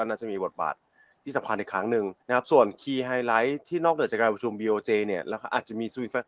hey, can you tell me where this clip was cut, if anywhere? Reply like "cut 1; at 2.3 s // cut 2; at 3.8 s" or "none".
cut 1; at 2.2 s